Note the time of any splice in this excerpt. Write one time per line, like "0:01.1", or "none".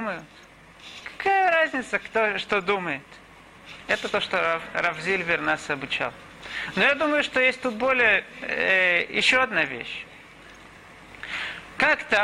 none